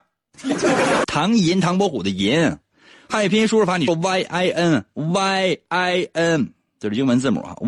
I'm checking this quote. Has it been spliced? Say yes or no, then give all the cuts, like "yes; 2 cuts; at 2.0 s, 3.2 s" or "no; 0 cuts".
yes; 2 cuts; at 1.0 s, 3.9 s